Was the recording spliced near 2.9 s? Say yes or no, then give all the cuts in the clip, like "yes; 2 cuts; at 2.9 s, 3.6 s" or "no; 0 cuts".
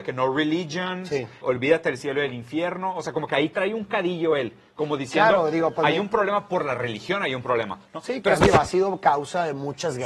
no; 1 cut; at 1.4 s